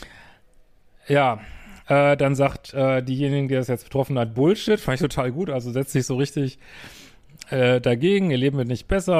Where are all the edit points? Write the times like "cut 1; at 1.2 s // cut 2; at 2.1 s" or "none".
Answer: none